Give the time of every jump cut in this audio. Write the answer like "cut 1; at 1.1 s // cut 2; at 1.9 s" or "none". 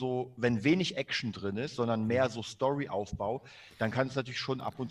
none